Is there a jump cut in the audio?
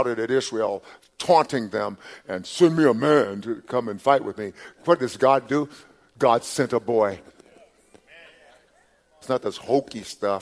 yes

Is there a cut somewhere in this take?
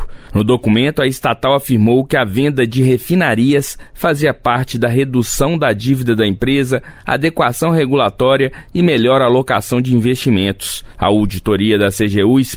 yes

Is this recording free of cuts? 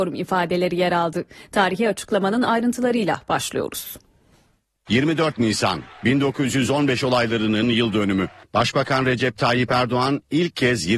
yes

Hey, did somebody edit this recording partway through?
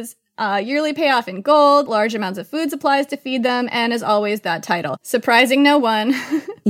yes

